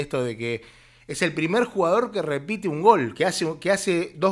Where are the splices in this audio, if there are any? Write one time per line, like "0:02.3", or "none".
none

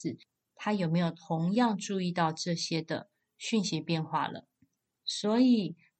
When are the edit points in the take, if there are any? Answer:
0:05.0

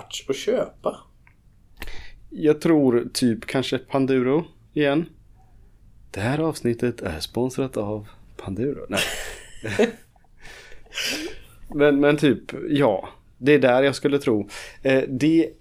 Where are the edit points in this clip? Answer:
none

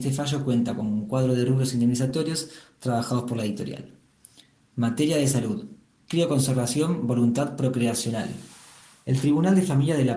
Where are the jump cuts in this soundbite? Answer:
none

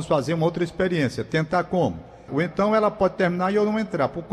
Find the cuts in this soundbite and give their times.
0:02.3

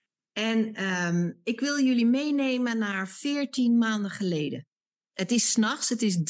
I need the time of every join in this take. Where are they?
0:05.1

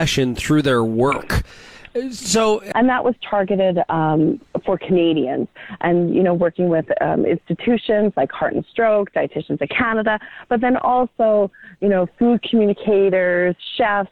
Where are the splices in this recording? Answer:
0:02.7

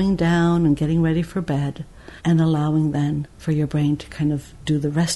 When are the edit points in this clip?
0:02.2
0:03.3

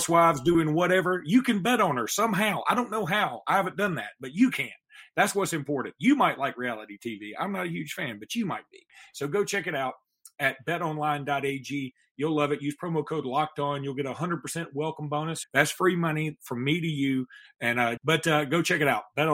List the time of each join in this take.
0:15.4
0:18.0

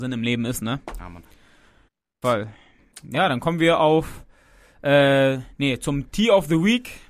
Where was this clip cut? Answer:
0:02.2

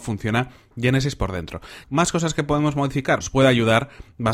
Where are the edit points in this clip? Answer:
0:01.8
0:03.2

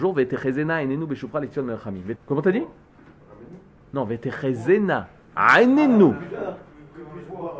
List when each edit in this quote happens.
0:02.2

